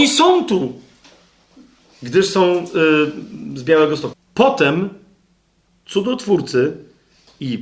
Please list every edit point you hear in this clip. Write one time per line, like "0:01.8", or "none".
0:04.1

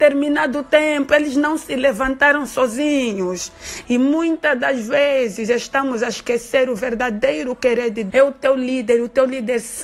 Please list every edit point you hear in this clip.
0:03.8
0:08.1

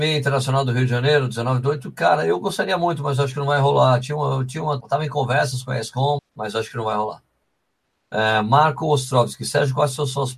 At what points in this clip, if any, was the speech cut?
0:04.8
0:06.2

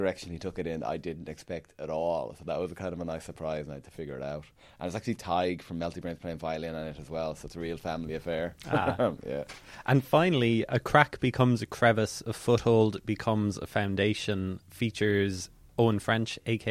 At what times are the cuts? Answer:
none

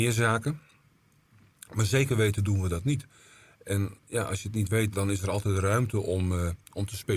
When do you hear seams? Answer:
0:04.9

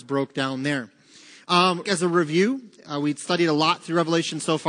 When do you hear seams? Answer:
0:01.8

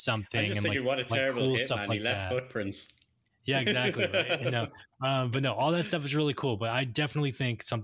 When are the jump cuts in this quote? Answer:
none

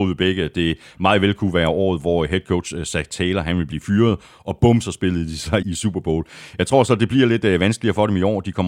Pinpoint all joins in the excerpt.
0:05.6

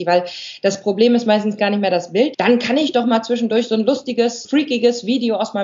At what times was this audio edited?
0:02.3
0:04.4

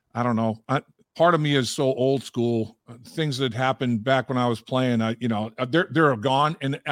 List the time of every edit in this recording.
none

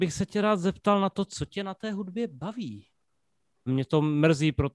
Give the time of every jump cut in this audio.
0:03.7

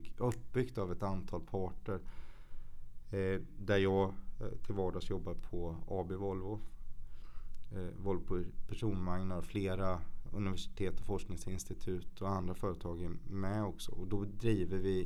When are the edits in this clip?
0:10.3

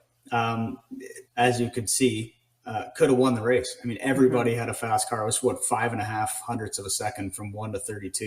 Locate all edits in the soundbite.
0:01.3

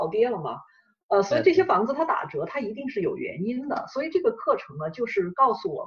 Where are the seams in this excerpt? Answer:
none

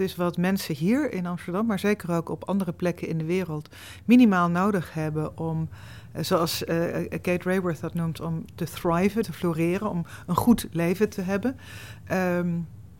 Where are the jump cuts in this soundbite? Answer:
0:09.2

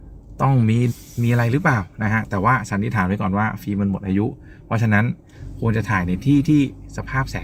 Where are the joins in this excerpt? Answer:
0:00.9

